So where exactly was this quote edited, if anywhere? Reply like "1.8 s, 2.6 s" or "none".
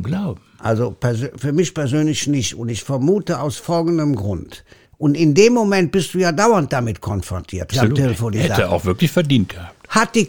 4.8 s, 7.7 s